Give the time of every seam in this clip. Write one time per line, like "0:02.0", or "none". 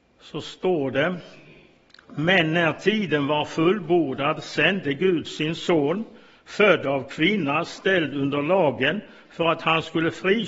none